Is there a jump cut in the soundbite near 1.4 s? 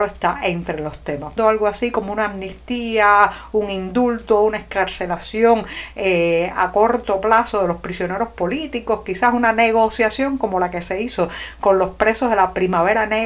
yes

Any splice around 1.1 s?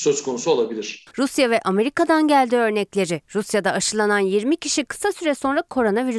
yes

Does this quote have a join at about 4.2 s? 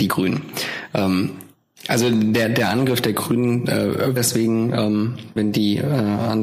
yes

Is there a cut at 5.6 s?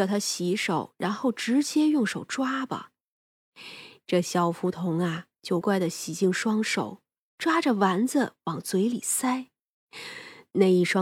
yes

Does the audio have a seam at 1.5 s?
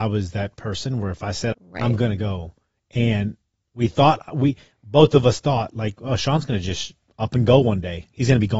yes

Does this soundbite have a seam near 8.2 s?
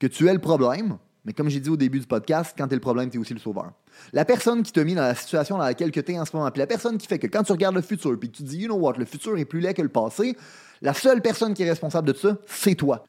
no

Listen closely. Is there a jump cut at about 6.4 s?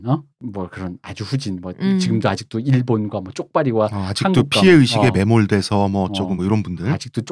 no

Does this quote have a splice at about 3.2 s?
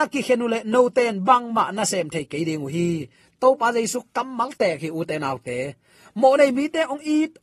no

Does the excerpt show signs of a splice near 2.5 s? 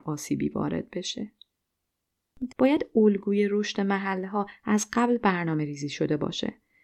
yes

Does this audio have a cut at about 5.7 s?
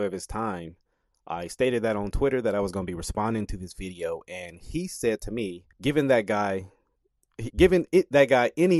yes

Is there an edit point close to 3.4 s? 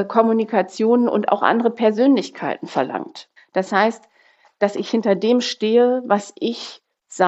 yes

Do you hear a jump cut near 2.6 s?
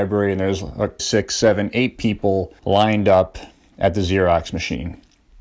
yes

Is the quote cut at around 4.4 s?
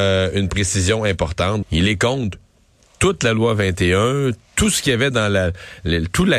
no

